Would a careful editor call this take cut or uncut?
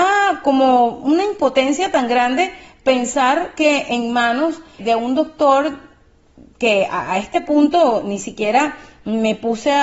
cut